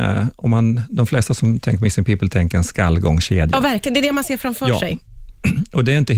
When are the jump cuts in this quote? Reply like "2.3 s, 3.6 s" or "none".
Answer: none